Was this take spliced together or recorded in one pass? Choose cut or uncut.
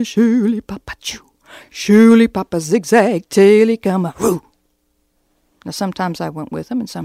uncut